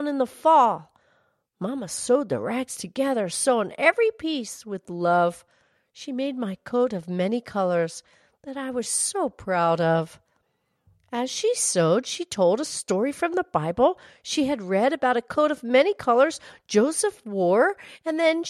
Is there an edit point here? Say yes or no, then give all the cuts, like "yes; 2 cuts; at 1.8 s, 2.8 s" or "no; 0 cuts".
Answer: no; 0 cuts